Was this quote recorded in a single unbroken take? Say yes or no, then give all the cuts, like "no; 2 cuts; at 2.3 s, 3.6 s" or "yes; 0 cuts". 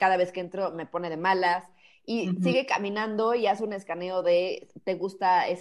yes; 0 cuts